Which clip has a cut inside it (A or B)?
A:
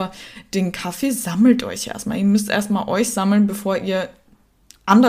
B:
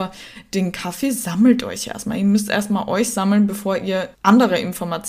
B